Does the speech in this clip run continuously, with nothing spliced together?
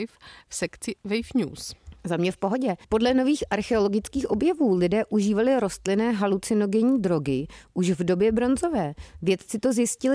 no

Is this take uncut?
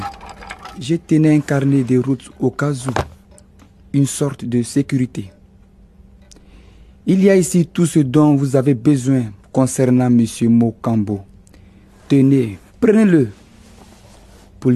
no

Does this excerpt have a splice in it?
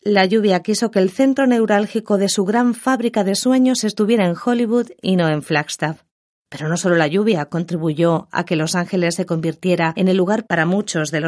no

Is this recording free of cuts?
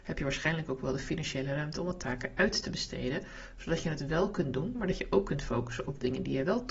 no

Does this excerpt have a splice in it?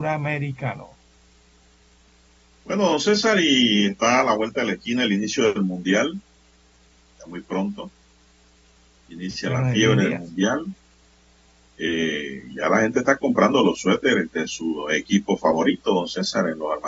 no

